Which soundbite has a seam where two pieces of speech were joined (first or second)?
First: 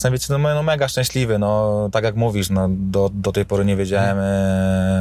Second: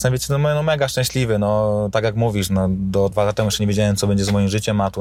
second